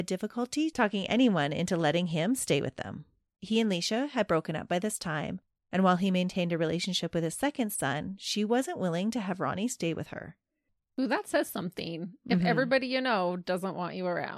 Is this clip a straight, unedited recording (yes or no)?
no